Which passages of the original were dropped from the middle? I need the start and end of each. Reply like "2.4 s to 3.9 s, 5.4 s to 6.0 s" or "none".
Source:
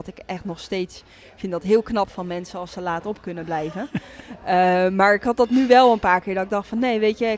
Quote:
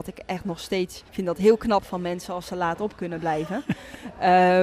1.1 s to 1.3 s